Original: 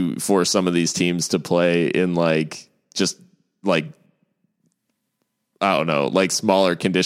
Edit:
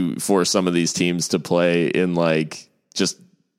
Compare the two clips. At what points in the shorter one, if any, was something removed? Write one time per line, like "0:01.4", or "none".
none

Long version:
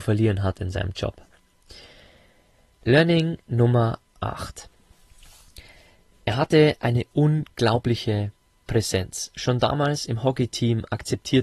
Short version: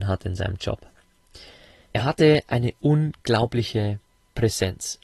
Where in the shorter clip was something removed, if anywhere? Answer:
0:01.8

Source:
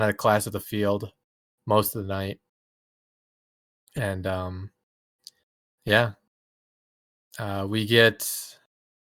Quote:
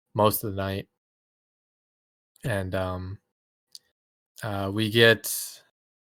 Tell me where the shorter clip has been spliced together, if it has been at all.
0:04.3

